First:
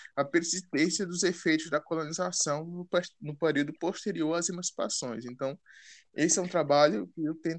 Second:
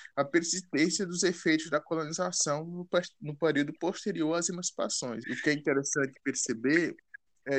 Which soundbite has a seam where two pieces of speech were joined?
second; 1 cut; at 5.2 s

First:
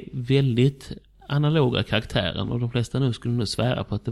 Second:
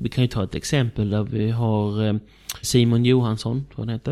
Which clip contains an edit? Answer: second; 1 cut; at 2.6 s

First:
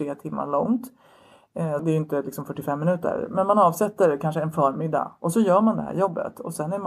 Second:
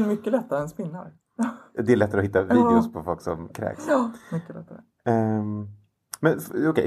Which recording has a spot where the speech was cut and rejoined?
first; 1 cut; at 1.8 s

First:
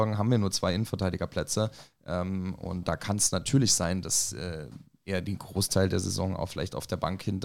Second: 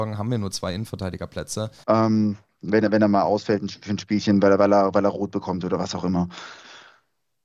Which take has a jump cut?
second; 1 cut; at 1.8 s

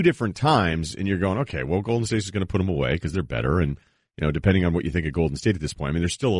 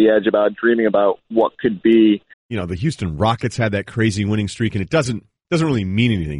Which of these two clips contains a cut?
second; 1 cut; at 2.3 s

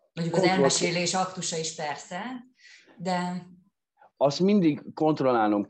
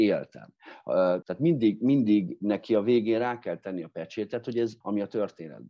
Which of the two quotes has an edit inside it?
second; 2 cuts; at 1.2 s, 4.8 s

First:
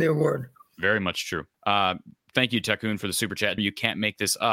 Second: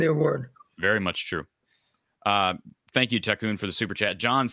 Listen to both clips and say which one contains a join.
first; 2 cuts; at 1.5 s, 3.6 s

